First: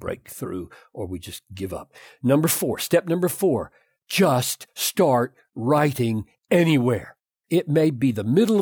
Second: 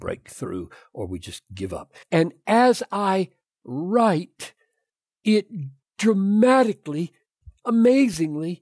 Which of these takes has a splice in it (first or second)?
second